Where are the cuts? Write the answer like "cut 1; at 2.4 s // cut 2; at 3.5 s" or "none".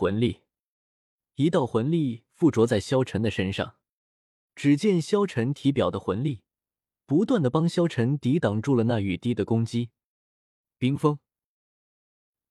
none